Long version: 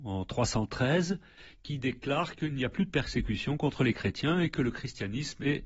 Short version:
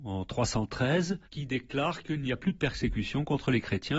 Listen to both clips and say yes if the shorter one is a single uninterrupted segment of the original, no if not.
no